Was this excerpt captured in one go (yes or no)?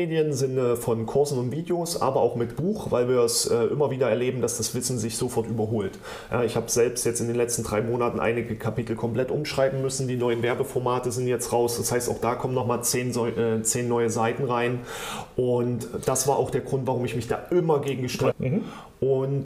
no